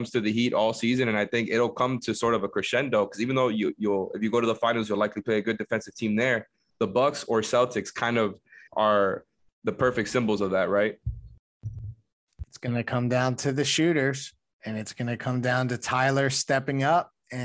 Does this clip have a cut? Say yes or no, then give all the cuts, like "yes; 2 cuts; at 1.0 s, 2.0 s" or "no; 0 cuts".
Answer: yes; 1 cut; at 8.7 s